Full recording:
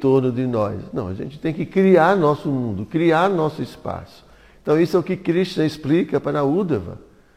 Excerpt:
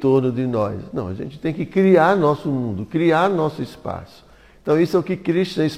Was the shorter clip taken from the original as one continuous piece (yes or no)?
yes